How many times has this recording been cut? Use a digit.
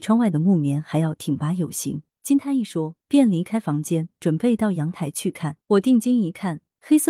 2